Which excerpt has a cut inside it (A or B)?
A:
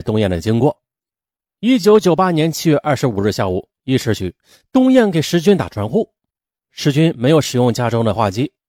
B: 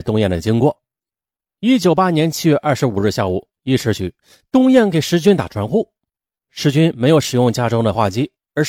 B